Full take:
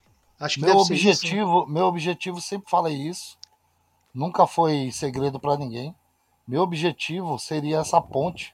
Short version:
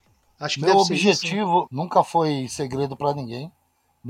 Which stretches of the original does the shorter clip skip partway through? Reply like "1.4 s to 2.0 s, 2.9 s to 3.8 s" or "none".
1.7 s to 4.1 s